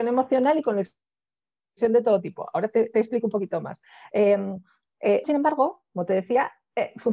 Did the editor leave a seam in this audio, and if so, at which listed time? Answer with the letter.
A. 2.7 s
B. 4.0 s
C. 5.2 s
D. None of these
C